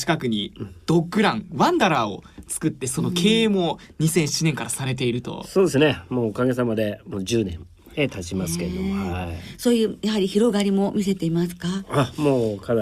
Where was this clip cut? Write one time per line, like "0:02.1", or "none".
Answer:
none